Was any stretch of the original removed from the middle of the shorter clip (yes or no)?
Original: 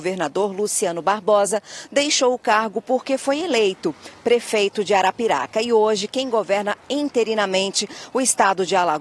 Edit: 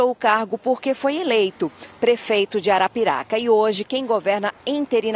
no